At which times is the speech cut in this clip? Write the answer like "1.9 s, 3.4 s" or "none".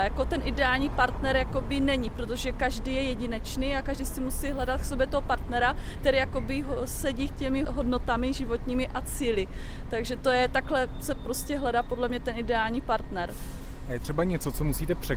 none